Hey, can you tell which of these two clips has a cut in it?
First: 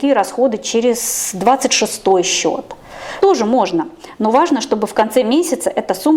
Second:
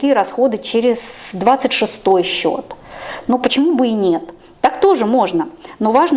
first; 1 cut; at 3.2 s

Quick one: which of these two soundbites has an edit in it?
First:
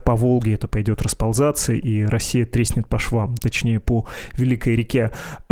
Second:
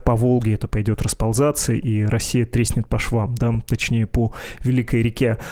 first; 1 cut; at 3.4 s

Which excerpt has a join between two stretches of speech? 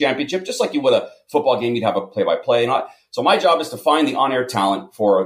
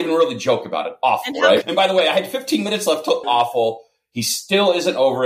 second; 2 cuts; at 1.6 s, 3.2 s

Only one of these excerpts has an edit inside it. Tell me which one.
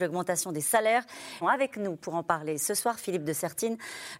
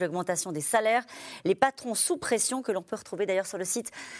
first; 1 cut; at 1.4 s

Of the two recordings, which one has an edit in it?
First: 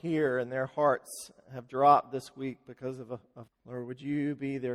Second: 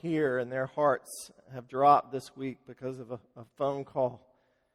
first; 1 cut; at 3.5 s

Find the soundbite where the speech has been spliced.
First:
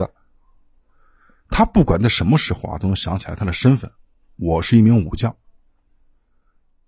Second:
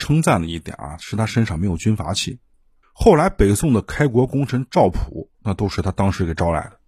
second; 2 cuts; at 2.8 s, 5.3 s

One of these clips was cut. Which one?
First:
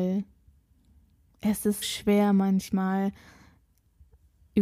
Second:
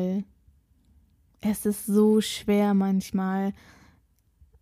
first; 1 cut; at 1.8 s

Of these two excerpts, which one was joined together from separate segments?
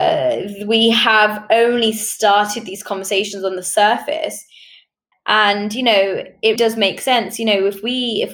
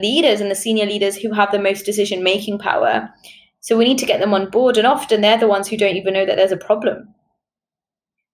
first; 2 cuts; at 5.1 s, 6.6 s

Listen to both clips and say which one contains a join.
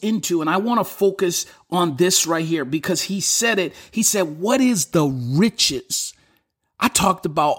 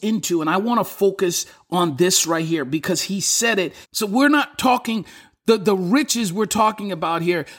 second; 1 cut; at 3.8 s

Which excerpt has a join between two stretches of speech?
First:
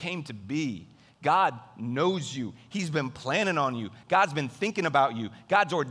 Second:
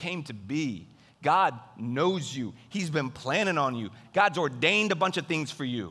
second; 1 cut; at 4.0 s

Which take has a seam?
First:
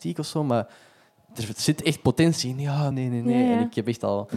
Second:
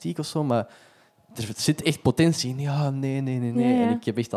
first; 1 cut; at 2.9 s

